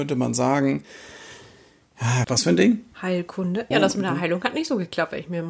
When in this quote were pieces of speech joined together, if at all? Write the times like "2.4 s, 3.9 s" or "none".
2.2 s, 3.7 s

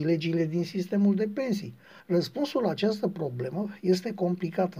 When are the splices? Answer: 2.0 s

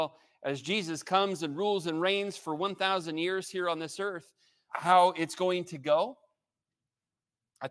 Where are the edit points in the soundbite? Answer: 4.7 s

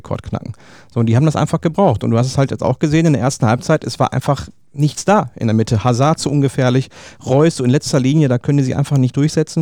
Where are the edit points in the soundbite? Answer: none

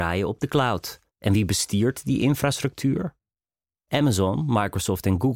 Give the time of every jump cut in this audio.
1.1 s

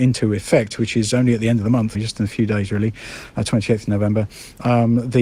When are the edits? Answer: 1.9 s

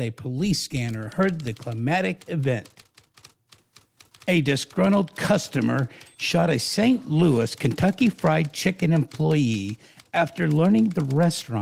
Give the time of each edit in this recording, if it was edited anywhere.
none

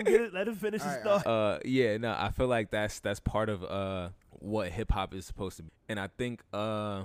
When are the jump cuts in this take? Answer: 1.2 s, 4.2 s, 5.7 s

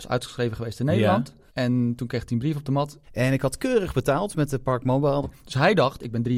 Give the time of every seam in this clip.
1.5 s, 3.0 s, 5.2 s

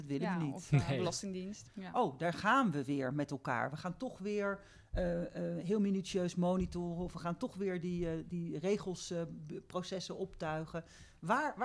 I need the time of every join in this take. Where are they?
1.7 s

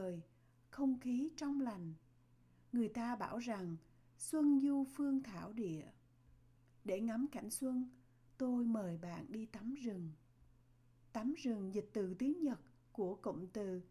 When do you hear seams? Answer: 11.0 s

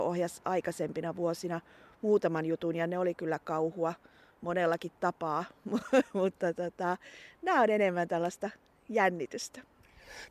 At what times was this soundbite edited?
none

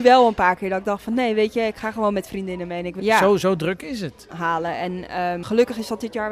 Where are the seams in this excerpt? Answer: 3.0 s, 4.3 s, 5.4 s

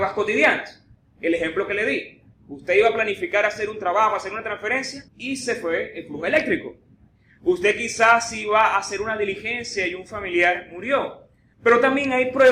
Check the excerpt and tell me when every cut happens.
5.1 s, 11.5 s

